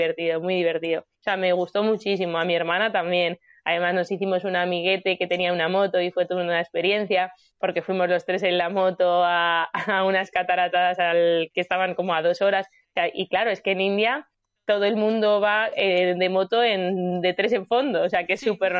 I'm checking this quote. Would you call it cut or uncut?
cut